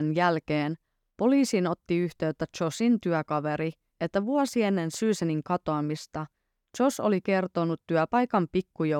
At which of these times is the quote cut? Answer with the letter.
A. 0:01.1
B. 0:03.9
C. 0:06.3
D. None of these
B